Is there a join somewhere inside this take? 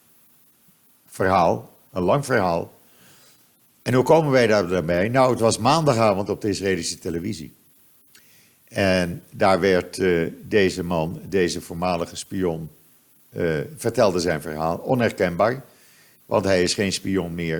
no; 0 cuts

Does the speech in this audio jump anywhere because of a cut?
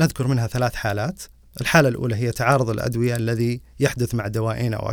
no; 0 cuts

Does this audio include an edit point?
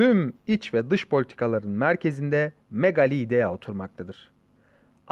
no; 0 cuts

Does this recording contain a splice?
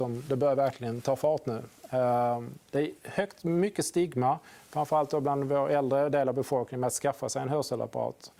yes; 1 cut; at 2.7 s

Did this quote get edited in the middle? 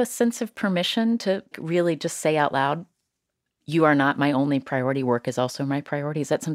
yes; 1 cut; at 1.5 s

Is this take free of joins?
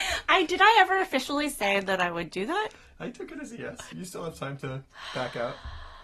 no; 1 cut; at 3.9 s

